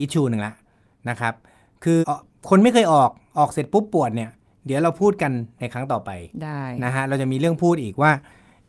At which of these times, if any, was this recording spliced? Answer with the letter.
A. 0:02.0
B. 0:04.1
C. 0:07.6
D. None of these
A